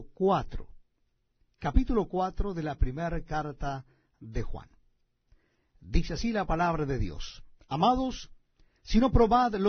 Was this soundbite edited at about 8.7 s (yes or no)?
yes